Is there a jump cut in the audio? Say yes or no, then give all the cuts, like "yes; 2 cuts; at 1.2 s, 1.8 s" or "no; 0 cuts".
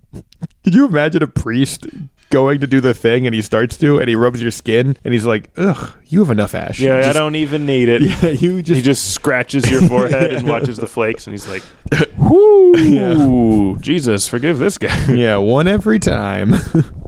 no; 0 cuts